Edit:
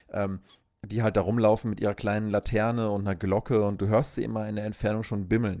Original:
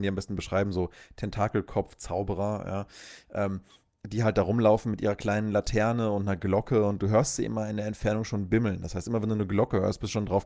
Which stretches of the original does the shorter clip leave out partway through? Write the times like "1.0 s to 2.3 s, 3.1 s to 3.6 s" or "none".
none

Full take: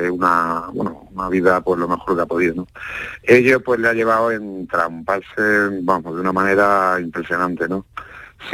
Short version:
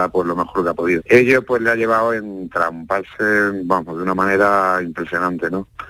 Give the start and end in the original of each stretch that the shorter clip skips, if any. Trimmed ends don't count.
2.5 s to 3.2 s

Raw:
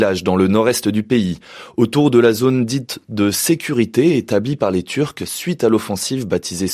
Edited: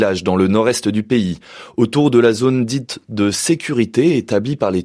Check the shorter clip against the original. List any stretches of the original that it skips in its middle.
none

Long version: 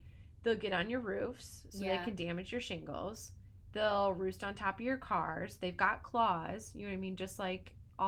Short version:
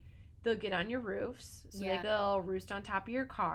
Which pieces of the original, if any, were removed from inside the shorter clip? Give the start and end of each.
2.0 s to 3.7 s

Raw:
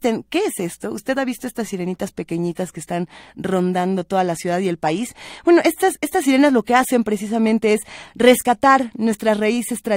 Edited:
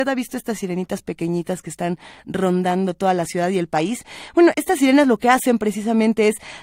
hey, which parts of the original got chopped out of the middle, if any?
5.6 s to 6.0 s

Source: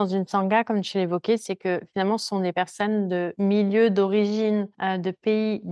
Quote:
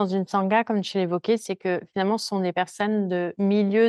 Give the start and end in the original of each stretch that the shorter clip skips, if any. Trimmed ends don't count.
none

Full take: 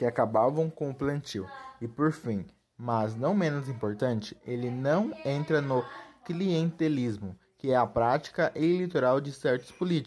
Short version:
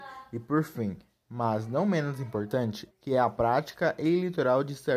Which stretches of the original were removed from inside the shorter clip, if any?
4.4 s to 7.5 s

